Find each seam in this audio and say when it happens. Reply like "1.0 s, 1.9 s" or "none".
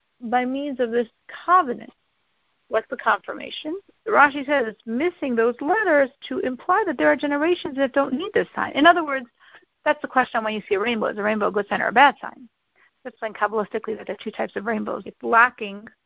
4.0 s, 13.1 s, 15.0 s